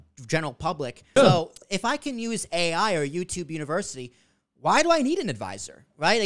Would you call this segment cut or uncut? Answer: cut